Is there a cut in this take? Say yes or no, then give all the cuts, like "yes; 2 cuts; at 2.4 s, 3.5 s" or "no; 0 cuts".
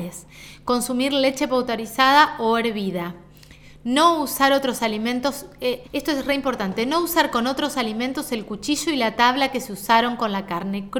yes; 1 cut; at 5.8 s